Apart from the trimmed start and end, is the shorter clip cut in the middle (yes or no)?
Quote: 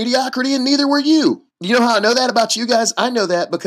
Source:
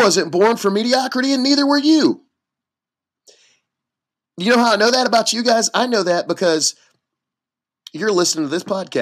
yes